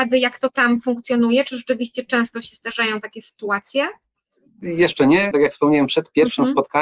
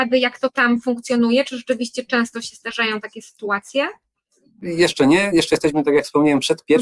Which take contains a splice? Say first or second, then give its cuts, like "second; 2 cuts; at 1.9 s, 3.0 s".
first; 1 cut; at 5.3 s